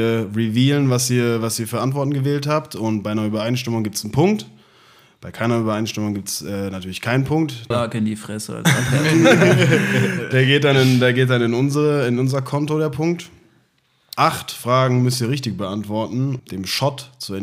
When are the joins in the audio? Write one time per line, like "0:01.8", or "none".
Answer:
0:07.7
0:14.2
0:16.4